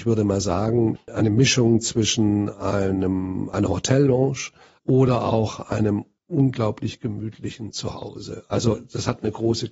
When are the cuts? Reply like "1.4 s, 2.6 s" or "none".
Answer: 1.0 s